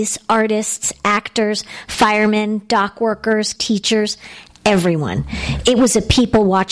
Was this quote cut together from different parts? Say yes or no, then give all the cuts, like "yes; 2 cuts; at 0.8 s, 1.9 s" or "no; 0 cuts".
yes; 1 cut; at 3.6 s